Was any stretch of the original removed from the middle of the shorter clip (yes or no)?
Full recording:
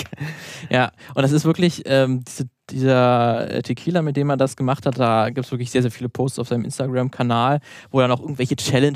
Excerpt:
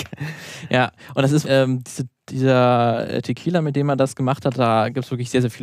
yes